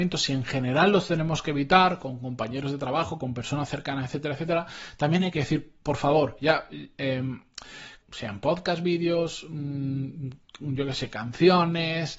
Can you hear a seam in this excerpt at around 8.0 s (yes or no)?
yes